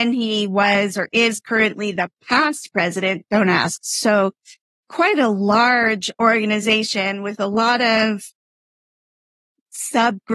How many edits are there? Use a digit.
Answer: 1